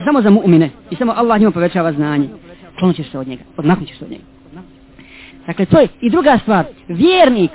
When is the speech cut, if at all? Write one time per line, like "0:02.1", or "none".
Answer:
0:02.7
0:05.3